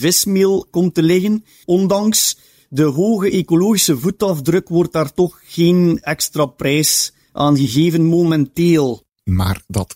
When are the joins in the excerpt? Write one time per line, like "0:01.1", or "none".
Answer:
0:01.6